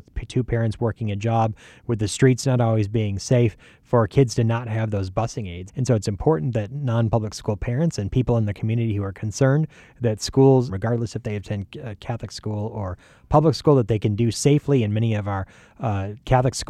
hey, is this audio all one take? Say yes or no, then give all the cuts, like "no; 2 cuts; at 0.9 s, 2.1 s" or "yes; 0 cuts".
no; 3 cuts; at 5.7 s, 10.7 s, 14.3 s